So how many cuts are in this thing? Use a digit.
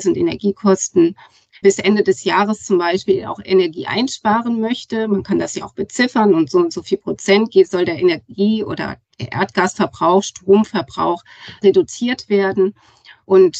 0